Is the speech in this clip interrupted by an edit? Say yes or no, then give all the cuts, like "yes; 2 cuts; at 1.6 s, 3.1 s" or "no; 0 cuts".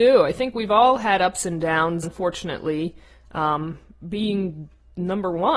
yes; 2 cuts; at 2.0 s, 4.0 s